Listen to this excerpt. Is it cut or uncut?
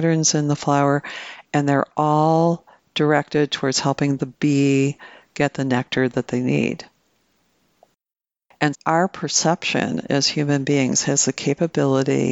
cut